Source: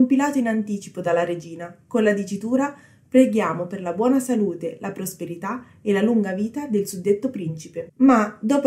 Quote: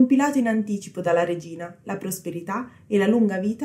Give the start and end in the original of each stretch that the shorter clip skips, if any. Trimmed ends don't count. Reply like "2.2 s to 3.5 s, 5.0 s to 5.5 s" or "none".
1.8 s to 4.8 s